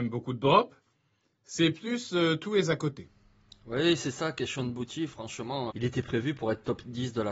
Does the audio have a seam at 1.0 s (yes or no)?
no